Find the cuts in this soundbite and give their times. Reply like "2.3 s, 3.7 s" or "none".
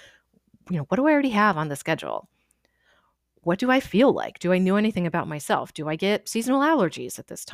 none